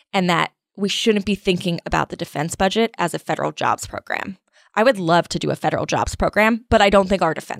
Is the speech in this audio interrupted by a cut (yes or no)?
no